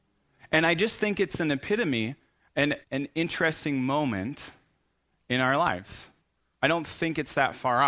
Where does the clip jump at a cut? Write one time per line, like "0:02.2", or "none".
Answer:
0:02.8